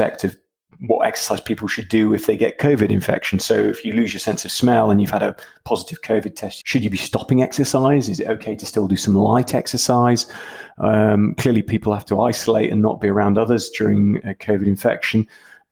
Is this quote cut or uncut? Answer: cut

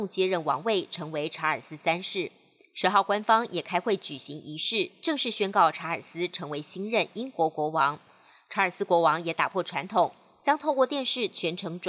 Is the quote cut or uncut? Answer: uncut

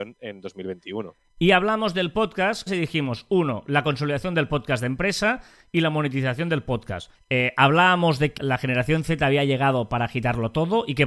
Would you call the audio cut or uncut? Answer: cut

